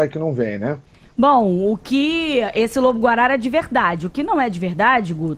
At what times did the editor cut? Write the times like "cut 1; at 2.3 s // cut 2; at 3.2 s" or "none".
none